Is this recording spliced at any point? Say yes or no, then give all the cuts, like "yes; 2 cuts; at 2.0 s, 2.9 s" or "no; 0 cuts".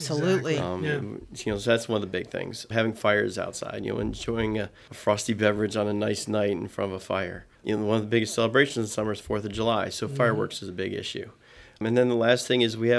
no; 0 cuts